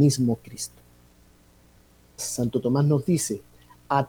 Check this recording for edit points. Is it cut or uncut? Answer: cut